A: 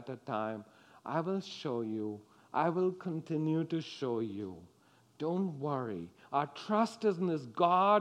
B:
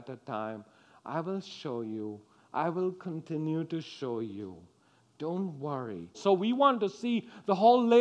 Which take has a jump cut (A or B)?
B